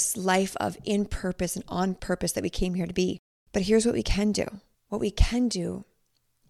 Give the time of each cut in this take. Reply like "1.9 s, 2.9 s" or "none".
none